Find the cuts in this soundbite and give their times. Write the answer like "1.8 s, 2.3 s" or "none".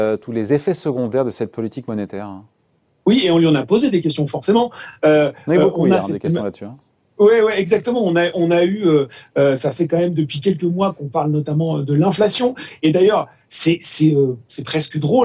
none